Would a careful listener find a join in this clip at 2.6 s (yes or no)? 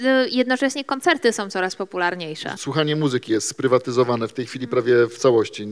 yes